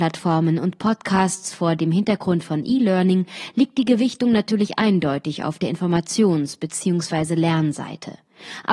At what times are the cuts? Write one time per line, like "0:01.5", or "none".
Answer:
none